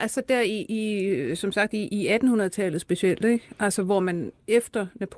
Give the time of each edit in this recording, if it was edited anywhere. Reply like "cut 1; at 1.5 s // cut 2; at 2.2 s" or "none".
none